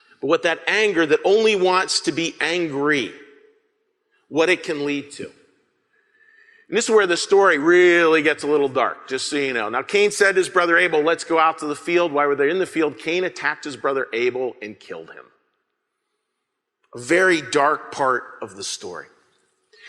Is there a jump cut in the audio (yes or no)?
no